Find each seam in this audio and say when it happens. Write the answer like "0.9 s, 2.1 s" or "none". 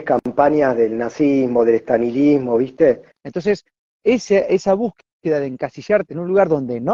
3.2 s